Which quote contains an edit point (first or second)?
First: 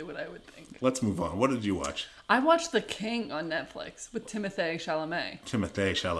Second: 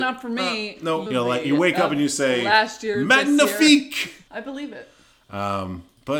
second